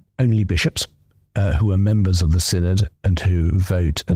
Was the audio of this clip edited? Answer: no; 0 cuts

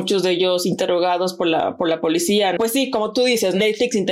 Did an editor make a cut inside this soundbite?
yes; 1 cut; at 2.6 s

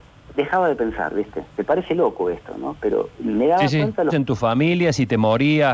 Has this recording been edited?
yes; 1 cut; at 4.1 s

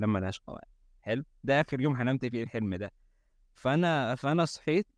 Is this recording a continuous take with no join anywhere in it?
yes; 0 cuts

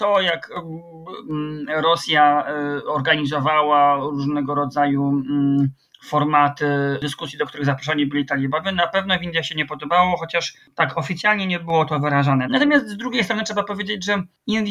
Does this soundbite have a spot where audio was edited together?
yes; 1 cut; at 12.4 s

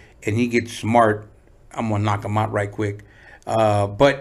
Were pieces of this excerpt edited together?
no; 0 cuts

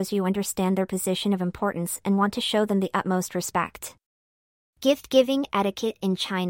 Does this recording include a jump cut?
no; 0 cuts

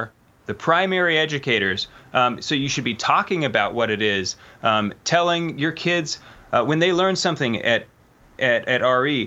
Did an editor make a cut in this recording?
no; 0 cuts

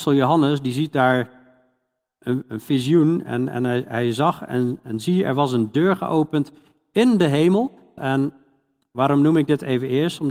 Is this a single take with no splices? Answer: no; 1 cut; at 8.0 s

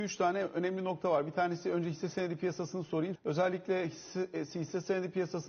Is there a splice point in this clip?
yes; 1 cut; at 3.2 s

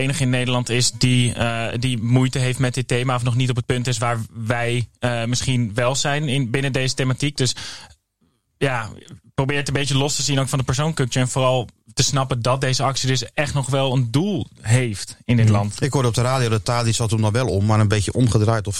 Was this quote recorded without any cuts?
yes; 0 cuts

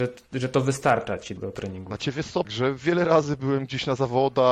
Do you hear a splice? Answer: yes; 2 cuts; at 1.4 s, 2.4 s

